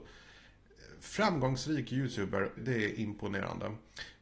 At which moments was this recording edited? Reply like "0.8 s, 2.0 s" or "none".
2.6 s

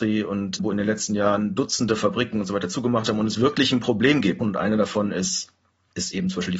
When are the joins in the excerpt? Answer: 4.4 s

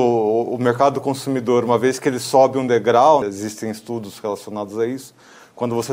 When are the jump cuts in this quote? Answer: 3.2 s

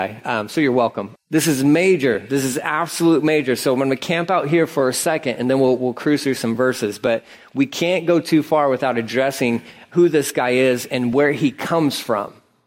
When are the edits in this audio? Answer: 1.2 s

